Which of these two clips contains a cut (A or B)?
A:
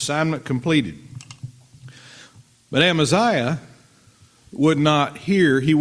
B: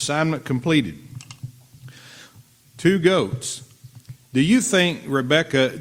B